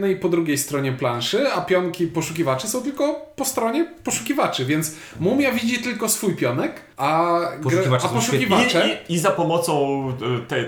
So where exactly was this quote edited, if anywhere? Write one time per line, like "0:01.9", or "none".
0:06.9